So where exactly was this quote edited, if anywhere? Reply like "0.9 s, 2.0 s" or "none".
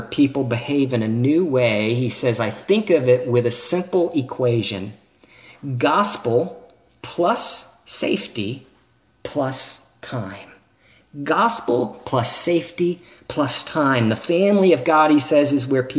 none